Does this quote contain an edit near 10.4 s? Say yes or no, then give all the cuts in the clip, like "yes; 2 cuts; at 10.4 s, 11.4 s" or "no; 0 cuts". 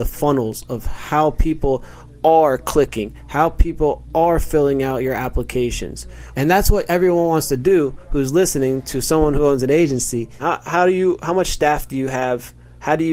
yes; 2 cuts; at 6.3 s, 10.4 s